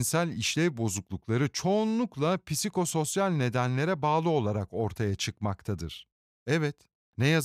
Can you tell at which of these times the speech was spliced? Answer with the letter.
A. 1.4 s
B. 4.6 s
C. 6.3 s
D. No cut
C